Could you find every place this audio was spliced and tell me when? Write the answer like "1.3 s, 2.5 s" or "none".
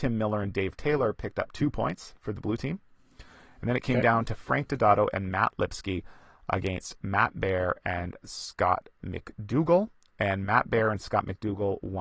none